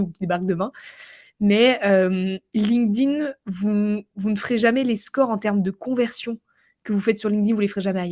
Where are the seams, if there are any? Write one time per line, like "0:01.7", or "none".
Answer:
none